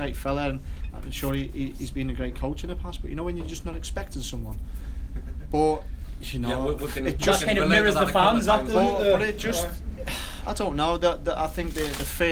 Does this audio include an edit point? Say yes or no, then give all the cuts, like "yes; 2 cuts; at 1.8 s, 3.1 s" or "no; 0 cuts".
no; 0 cuts